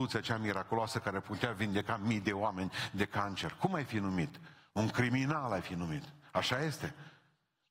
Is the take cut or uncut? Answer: uncut